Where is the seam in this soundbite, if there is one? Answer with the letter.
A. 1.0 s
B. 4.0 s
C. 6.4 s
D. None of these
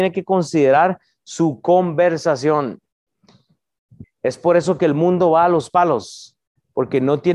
B